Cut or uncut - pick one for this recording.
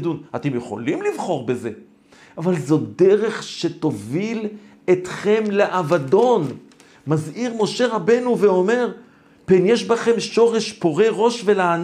uncut